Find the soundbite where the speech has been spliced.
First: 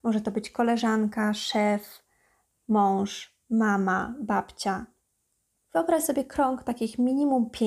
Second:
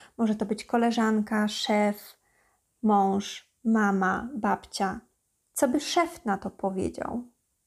second; 1 cut; at 5.5 s

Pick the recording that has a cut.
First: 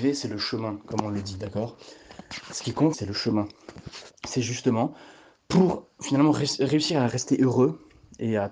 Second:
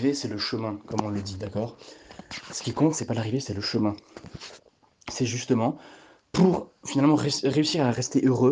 first; 2 cuts; at 2.9 s, 4.2 s

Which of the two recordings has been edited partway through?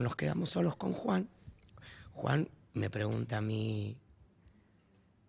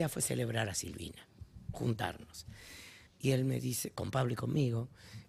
second; 1 cut; at 3.1 s

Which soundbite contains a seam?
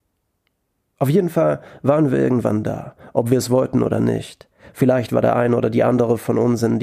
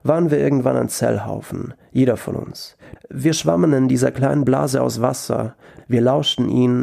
second; 2 cuts; at 2.9 s, 5.8 s

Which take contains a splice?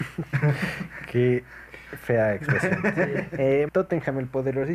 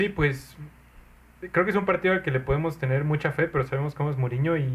first; 1 cut; at 3.7 s

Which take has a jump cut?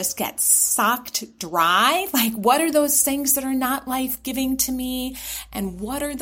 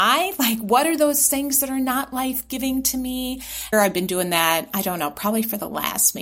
second; 1 cut; at 3.7 s

